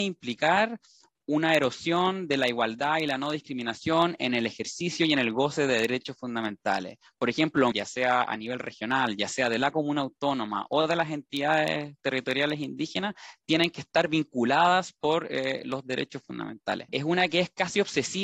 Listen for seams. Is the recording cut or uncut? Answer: cut